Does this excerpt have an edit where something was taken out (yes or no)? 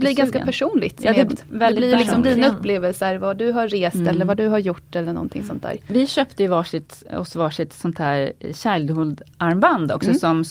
yes